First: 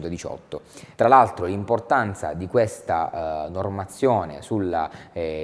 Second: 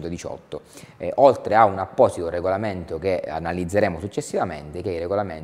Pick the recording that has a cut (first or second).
first